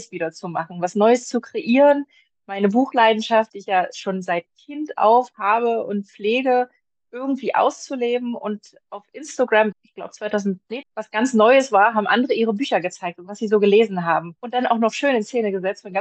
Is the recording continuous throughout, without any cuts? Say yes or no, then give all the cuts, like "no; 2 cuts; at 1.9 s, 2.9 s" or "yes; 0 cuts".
no; 3 cuts; at 9.7 s, 10.8 s, 14.4 s